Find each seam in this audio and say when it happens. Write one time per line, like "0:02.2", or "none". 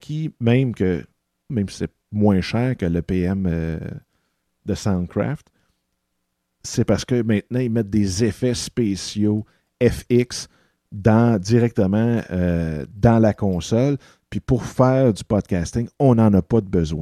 0:01.5

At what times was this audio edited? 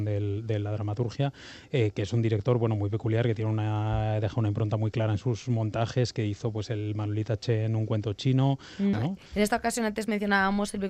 0:08.9

